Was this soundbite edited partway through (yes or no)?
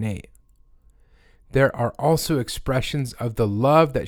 no